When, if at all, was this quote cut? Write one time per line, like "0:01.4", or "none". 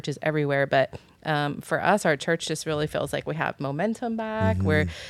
none